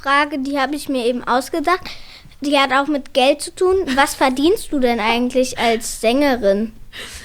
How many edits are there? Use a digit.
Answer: 0